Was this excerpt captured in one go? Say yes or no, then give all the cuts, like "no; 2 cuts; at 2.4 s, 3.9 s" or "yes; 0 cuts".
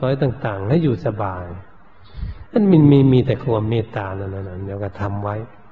yes; 0 cuts